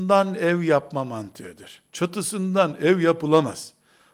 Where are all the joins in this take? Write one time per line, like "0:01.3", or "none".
0:01.9